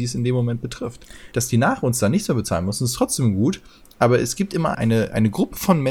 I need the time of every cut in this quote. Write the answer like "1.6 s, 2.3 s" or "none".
1.3 s, 4.7 s